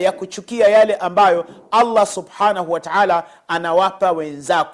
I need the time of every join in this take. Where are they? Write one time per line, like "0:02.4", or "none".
none